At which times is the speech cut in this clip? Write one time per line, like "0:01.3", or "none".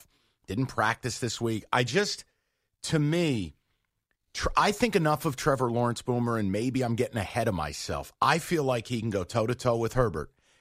none